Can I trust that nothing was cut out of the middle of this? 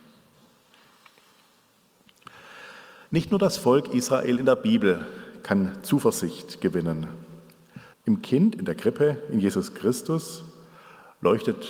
no; 2 cuts; at 3.1 s, 7.9 s

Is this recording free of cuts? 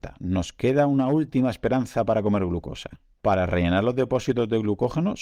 yes; 0 cuts

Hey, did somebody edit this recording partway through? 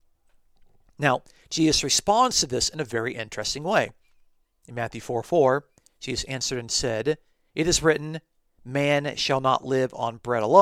no; 0 cuts

